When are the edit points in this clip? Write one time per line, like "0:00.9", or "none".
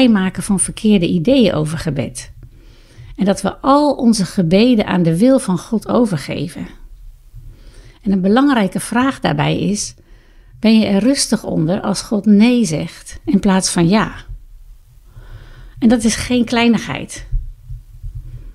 none